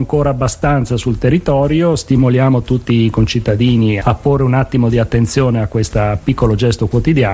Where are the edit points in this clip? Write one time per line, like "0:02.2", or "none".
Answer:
0:04.0